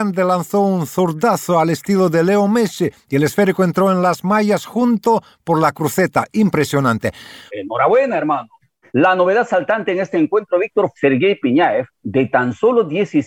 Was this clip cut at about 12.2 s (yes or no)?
no